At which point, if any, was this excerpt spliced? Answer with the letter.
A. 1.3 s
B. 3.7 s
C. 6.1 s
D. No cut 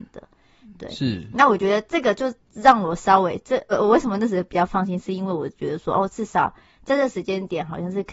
B